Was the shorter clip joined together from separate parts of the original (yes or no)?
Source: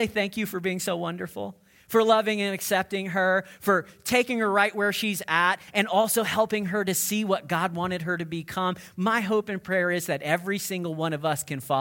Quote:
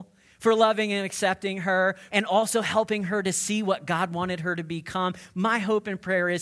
yes